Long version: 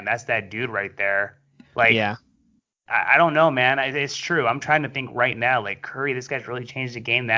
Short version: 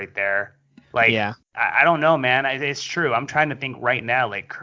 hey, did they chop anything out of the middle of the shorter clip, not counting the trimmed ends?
yes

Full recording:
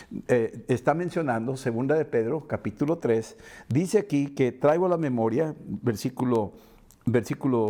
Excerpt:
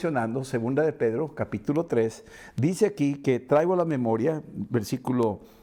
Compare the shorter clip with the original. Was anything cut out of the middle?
no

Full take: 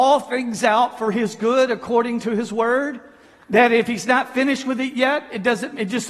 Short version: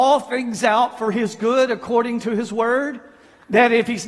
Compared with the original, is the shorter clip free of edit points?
yes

